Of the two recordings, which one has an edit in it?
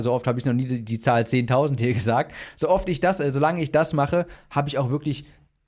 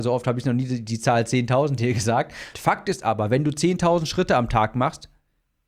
second; 1 cut; at 2.5 s

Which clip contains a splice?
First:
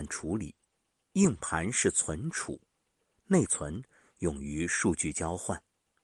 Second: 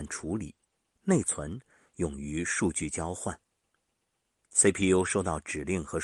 second; 1 cut; at 1.0 s

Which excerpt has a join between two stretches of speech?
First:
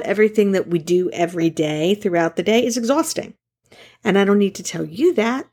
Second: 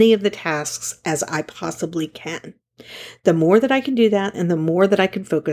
second; 1 cut; at 4.3 s

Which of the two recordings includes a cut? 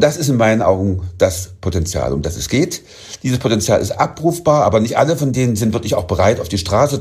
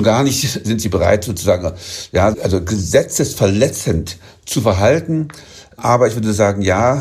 second; 1 cut; at 2.3 s

